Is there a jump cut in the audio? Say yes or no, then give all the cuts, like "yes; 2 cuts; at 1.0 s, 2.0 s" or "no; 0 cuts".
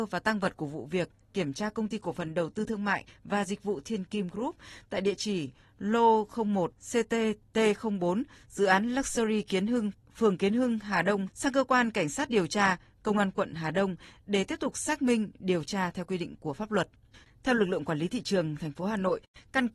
yes; 2 cuts; at 11.3 s, 17.2 s